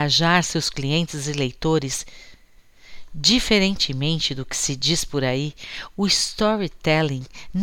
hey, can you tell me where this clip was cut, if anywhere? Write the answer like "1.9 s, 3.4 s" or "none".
none